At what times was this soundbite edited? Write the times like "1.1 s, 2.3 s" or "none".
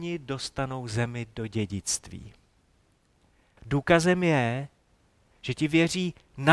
3.6 s